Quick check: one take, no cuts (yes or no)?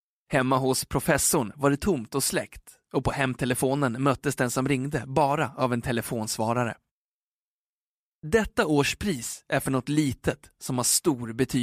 no